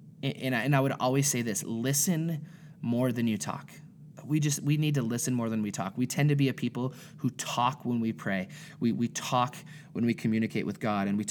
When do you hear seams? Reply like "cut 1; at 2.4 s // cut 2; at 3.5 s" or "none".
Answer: none

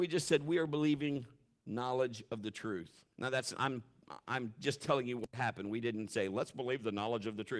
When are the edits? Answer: cut 1; at 3.1 s

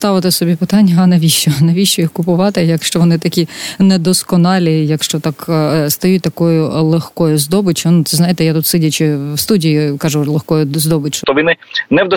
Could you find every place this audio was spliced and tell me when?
cut 1; at 11.2 s

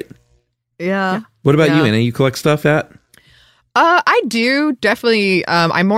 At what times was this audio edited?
cut 1; at 2.6 s

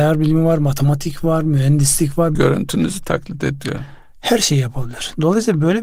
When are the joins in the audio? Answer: cut 1; at 2.4 s

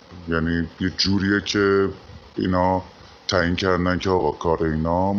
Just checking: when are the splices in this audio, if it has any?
cut 1; at 2.3 s

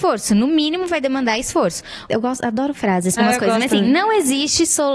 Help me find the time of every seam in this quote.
cut 1; at 2.1 s // cut 2; at 3.2 s

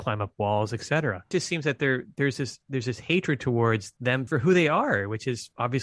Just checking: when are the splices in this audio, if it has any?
cut 1; at 4.3 s

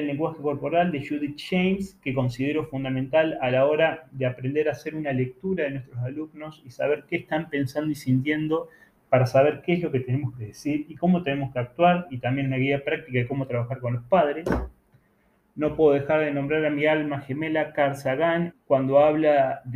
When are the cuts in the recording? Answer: cut 1; at 15.4 s // cut 2; at 18.5 s

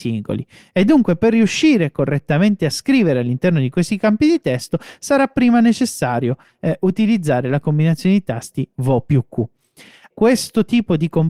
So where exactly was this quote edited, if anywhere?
cut 1; at 10.1 s

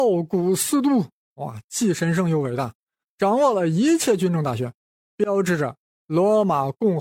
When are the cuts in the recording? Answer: none

